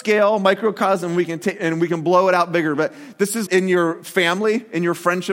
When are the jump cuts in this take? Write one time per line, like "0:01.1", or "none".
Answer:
0:03.5